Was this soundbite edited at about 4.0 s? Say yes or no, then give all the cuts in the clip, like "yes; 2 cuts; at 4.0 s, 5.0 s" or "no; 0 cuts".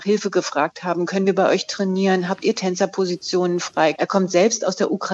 yes; 1 cut; at 4.0 s